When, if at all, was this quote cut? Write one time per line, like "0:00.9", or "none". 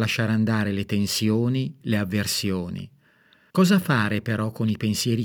0:01.8
0:03.5